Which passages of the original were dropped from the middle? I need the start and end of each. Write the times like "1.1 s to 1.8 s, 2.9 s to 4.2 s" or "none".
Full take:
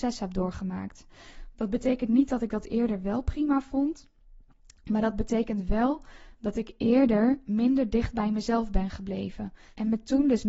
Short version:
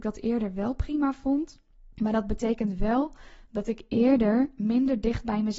4.4 s to 4.8 s